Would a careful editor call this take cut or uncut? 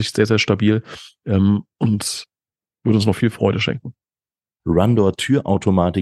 cut